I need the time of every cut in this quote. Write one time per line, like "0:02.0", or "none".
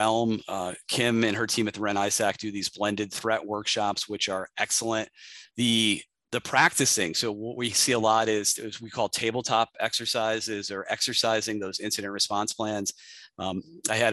0:05.5